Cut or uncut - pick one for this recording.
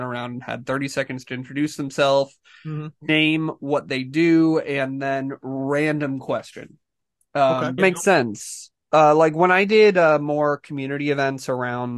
cut